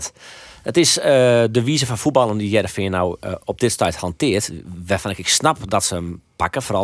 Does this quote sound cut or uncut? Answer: uncut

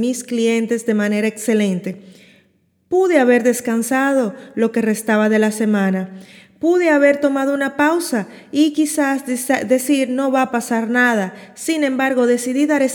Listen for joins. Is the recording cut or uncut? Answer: uncut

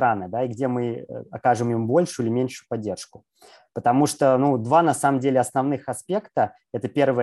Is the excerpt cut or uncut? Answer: uncut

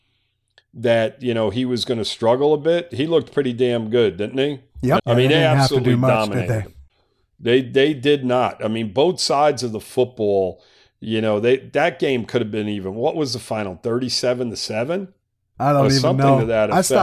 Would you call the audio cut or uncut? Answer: cut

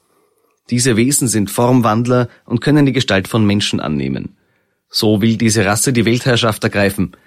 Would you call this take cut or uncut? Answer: uncut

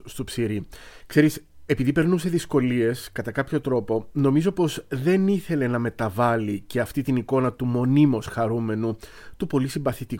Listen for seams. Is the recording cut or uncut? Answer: cut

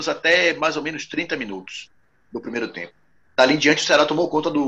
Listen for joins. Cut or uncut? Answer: uncut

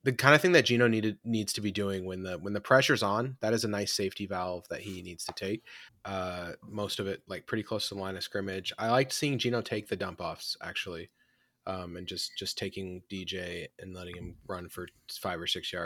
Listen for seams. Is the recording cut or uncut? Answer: cut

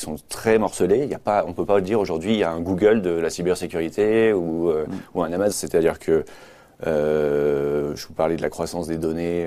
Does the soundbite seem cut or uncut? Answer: cut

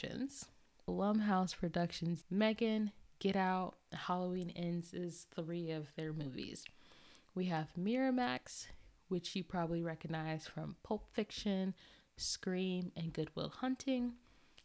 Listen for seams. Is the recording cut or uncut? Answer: cut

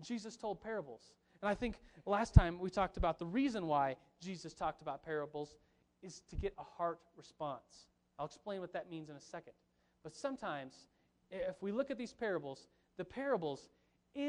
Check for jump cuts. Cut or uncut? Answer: uncut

